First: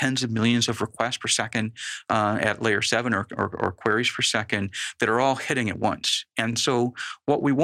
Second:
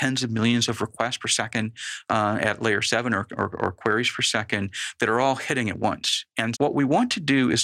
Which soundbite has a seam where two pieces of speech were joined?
second; 1 cut; at 6.5 s

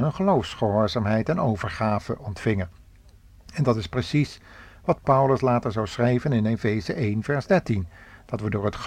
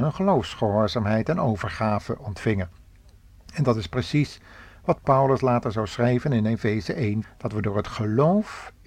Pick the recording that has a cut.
second; 1 cut; at 7.2 s

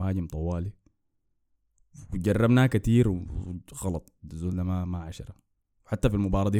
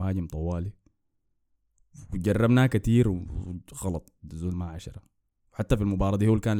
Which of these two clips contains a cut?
second; 1 cut; at 4.5 s

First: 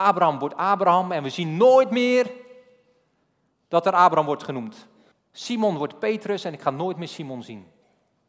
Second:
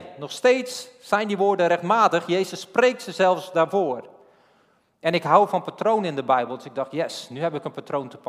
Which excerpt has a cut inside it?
first; 1 cut; at 5.1 s

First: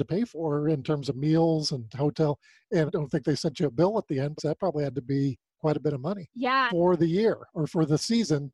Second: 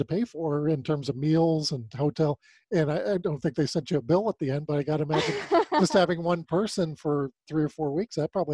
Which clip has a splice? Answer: first; 3 cuts; at 2.9 s, 4.4 s, 6.7 s

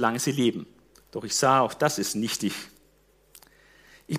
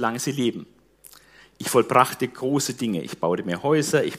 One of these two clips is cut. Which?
first; 1 cut; at 0.9 s

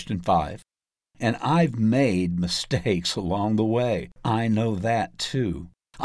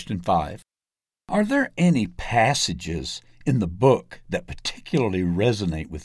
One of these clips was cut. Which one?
first; 2 cuts; at 1.0 s, 4.2 s

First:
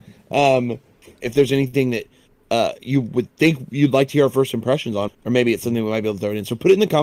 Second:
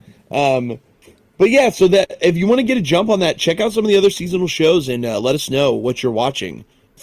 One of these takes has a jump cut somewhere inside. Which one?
first; 2 cuts; at 1.2 s, 5.1 s

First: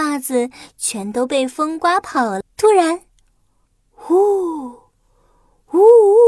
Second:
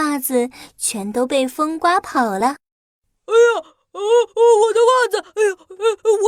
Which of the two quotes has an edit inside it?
first; 1 cut; at 2.4 s

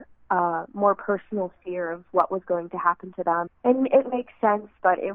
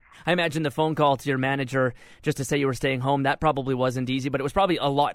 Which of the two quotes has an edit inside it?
first; 1 cut; at 3.5 s

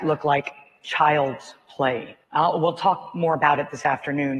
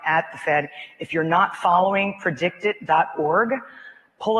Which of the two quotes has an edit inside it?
first; 1 cut; at 2.2 s

